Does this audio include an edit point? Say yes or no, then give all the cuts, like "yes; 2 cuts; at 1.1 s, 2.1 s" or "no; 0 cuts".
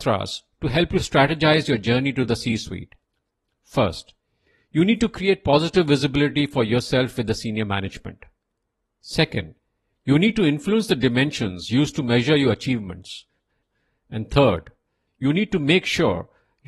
yes; 1 cut; at 15.1 s